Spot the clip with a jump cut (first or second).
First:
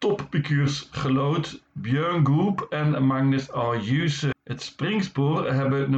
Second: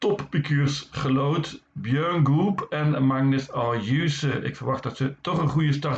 first